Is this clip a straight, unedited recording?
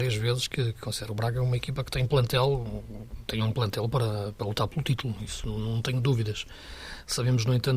yes; 0 cuts

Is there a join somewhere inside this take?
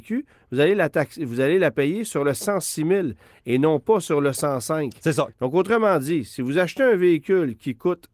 yes; 1 cut; at 5.3 s

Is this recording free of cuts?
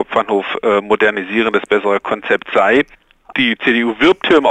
no; 1 cut; at 3.3 s

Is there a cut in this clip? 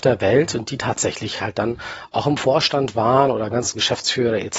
no; 0 cuts

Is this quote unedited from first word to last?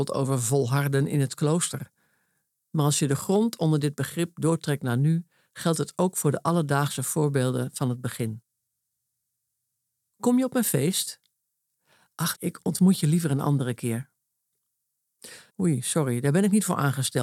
no; 2 cuts; at 12.3 s, 15.5 s

